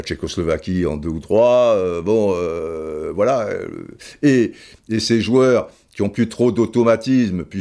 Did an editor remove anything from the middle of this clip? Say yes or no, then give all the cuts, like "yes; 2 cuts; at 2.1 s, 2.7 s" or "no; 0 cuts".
no; 0 cuts